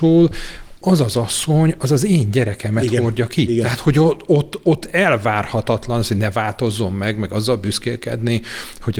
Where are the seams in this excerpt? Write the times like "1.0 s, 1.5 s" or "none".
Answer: none

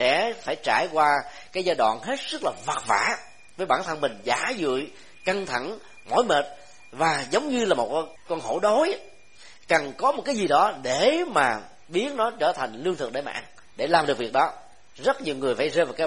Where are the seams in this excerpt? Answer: 8.2 s, 13.7 s

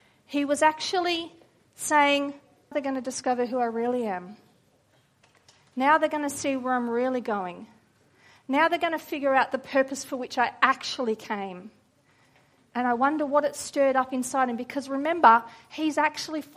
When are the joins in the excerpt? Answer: 2.7 s

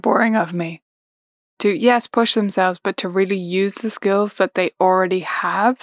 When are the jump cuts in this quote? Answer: 1.4 s

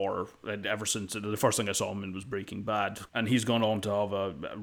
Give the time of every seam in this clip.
3.1 s

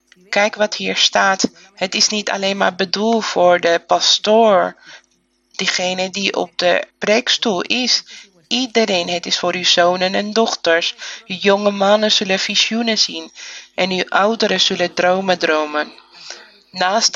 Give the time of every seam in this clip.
6.9 s

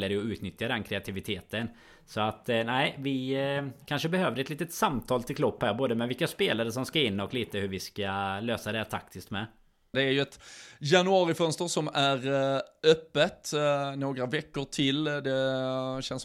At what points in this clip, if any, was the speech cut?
9.9 s

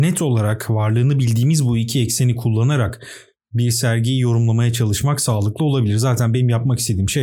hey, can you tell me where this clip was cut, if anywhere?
none

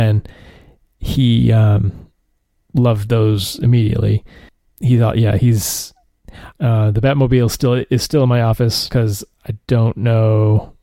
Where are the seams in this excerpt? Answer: 6.5 s, 8.9 s

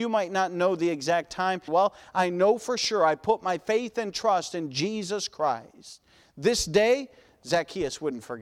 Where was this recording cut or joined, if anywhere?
1.7 s

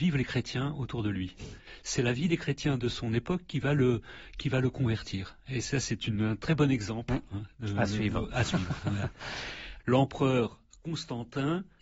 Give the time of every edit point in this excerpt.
9.8 s

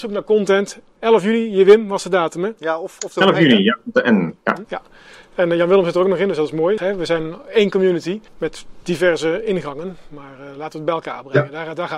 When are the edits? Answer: 4.6 s, 6.8 s, 8.3 s

